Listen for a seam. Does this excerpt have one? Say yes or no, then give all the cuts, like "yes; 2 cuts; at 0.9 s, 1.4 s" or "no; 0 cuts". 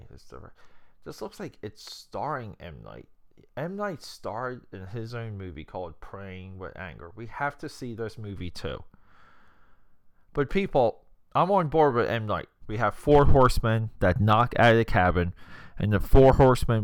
yes; 1 cut; at 12.6 s